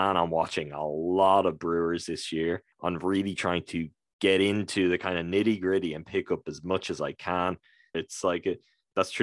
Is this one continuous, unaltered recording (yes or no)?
no